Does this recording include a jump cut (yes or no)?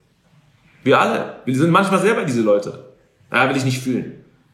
no